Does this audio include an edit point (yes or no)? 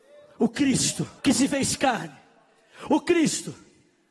yes